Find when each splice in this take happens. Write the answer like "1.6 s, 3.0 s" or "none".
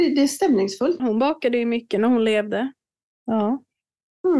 1.0 s, 3.0 s